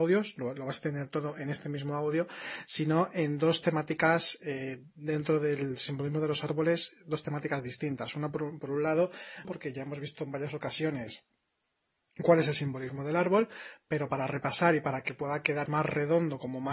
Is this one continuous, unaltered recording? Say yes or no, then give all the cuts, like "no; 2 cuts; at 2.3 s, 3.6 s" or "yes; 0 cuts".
no; 2 cuts; at 9.4 s, 15.7 s